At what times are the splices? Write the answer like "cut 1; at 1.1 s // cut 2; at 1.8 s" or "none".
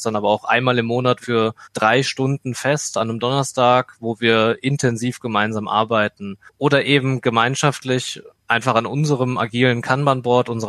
cut 1; at 1.2 s